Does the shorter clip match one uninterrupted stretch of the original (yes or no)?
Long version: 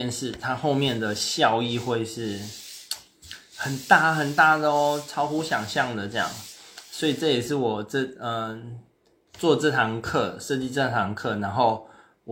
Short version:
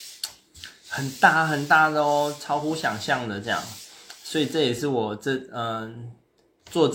yes